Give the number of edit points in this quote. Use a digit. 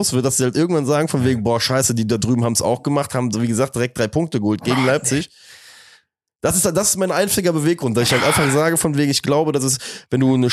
0